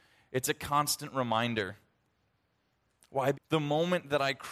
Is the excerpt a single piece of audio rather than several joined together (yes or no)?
no